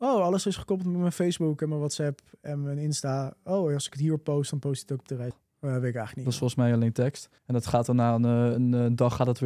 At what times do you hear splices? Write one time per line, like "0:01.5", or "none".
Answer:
0:05.3
0:07.4